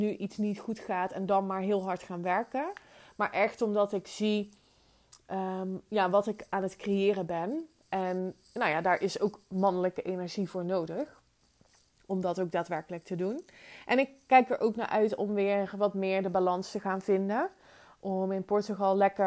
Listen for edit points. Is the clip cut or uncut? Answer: uncut